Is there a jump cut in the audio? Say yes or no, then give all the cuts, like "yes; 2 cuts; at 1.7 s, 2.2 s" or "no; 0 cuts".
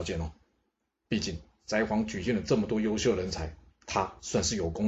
yes; 2 cuts; at 1.1 s, 3.7 s